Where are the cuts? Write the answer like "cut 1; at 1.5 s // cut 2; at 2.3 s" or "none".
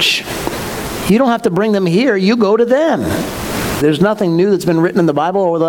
cut 1; at 3.8 s